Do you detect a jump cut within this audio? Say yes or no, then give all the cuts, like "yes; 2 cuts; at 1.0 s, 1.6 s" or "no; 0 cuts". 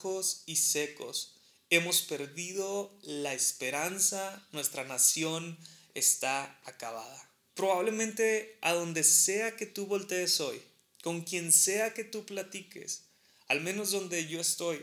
yes; 1 cut; at 7.5 s